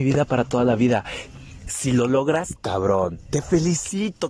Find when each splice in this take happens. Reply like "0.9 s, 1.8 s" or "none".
2.6 s